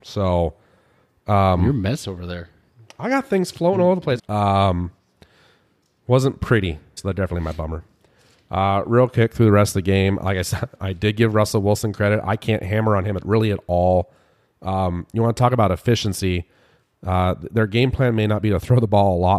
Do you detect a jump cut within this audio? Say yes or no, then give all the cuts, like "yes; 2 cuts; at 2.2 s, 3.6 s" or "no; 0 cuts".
yes; 2 cuts; at 4.2 s, 7.0 s